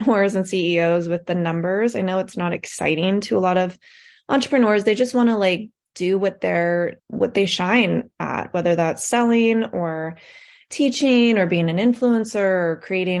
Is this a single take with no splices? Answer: no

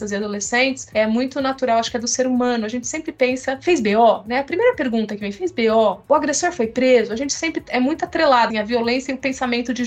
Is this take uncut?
no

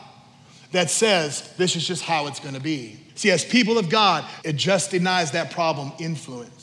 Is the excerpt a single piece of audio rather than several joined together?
no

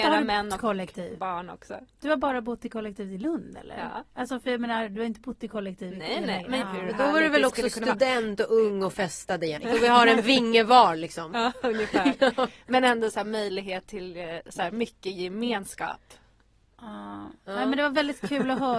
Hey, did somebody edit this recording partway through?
yes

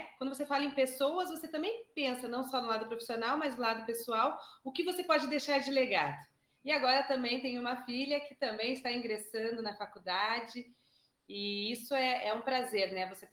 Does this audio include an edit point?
yes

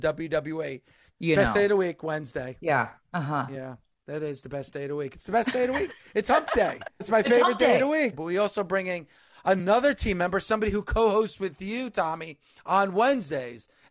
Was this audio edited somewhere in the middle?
yes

